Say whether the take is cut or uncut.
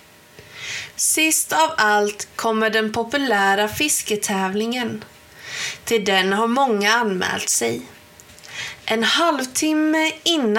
cut